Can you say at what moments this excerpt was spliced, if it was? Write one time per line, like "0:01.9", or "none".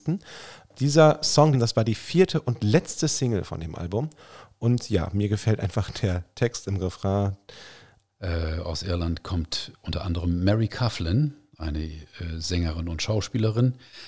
0:01.5
0:08.1